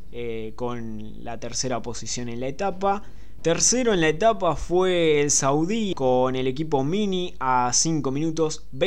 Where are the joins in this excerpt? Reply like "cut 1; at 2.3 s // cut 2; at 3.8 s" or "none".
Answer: cut 1; at 3.4 s // cut 2; at 5.9 s

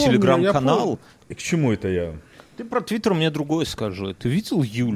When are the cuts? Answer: cut 1; at 1.2 s

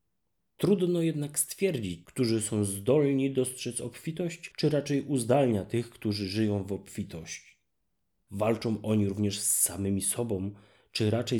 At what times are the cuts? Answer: cut 1; at 2.0 s // cut 2; at 8.2 s

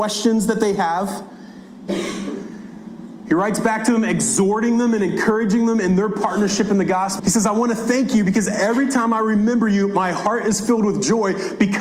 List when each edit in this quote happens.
cut 1; at 1.9 s // cut 2; at 7.2 s

